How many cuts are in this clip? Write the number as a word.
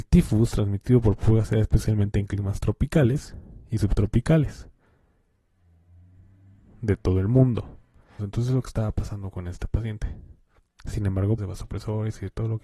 two